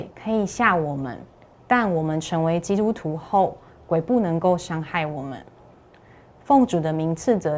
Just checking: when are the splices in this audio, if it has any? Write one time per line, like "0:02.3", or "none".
none